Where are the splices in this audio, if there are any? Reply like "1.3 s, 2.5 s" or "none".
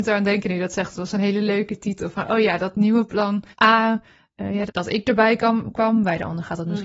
3.5 s, 4.7 s